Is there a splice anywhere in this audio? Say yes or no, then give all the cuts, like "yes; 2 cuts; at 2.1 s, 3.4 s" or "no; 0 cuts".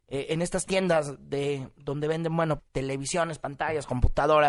yes; 1 cut; at 2.6 s